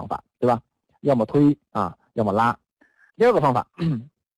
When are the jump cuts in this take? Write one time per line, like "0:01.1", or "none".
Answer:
0:03.1